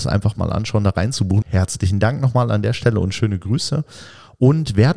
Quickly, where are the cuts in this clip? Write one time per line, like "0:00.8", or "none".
0:01.4

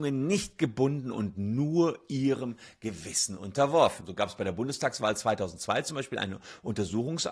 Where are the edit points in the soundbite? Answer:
0:04.0

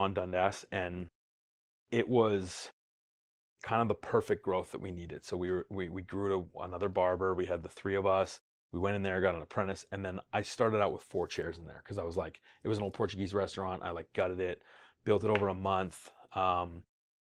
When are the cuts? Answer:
none

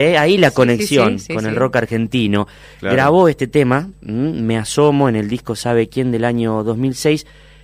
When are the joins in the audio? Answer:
none

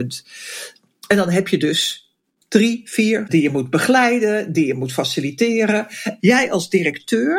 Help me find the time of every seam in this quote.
0:03.3
0:06.2

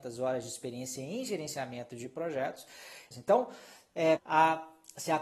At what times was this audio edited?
0:03.1
0:04.2

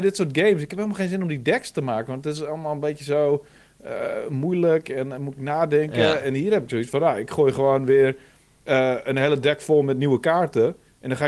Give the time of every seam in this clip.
none

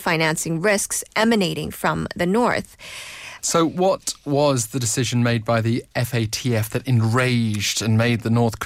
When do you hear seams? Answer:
0:03.4

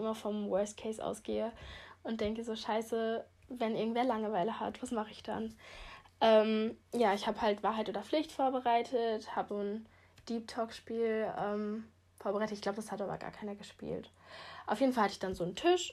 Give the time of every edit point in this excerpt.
0:09.5

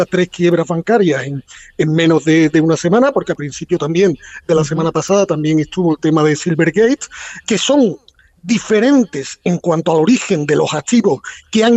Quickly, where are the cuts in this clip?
0:07.4

